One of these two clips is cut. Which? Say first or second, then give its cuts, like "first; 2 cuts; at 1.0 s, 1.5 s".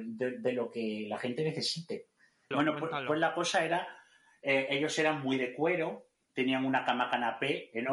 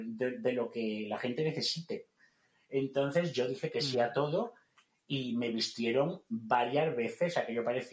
first; 1 cut; at 2.5 s